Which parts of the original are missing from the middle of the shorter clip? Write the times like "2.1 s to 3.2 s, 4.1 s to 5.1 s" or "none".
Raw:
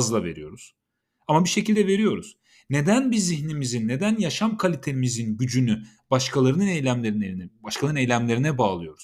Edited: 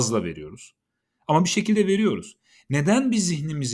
none